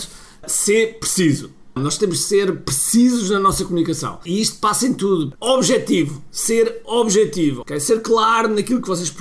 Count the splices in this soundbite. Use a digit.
3